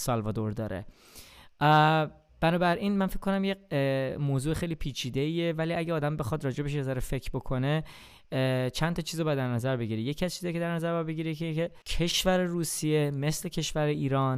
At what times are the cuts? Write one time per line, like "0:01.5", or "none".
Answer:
0:11.8

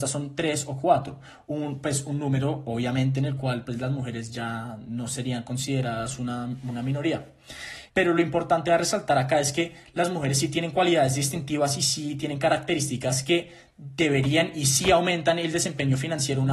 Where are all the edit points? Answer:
0:07.9

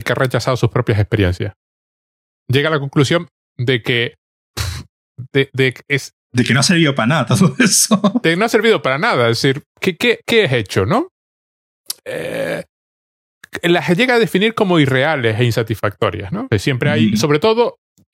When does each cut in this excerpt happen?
0:16.5

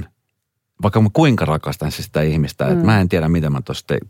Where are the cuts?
none

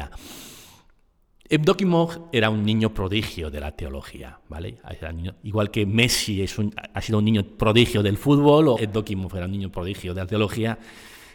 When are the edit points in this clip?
0:08.8

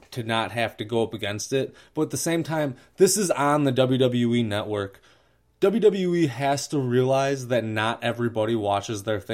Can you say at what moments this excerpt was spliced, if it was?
none

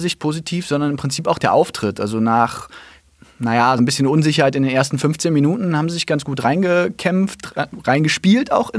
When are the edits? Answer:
0:03.8

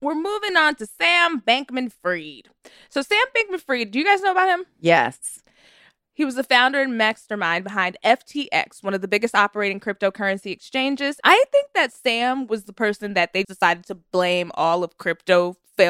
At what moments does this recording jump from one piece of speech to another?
0:11.2
0:13.4

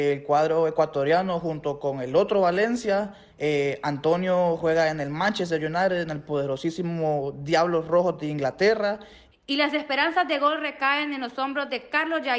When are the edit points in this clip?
0:03.3
0:09.3

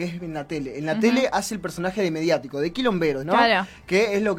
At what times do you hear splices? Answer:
0:03.2

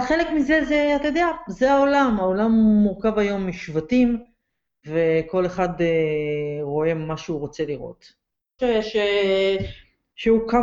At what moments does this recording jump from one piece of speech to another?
0:08.6

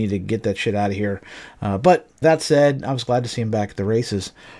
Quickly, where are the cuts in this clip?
0:02.2

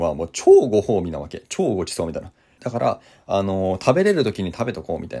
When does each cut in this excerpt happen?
0:02.6

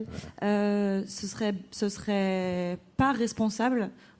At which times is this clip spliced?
none

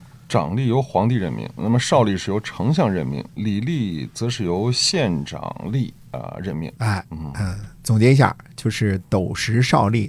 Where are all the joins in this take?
0:06.8

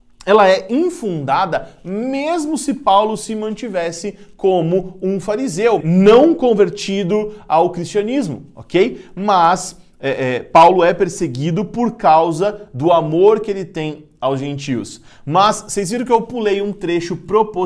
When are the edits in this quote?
0:05.8

